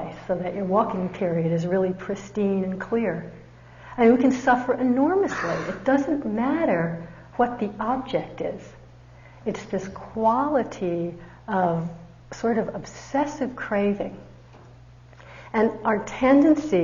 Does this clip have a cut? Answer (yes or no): no